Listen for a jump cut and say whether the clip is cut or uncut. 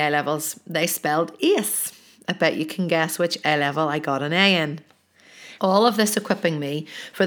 cut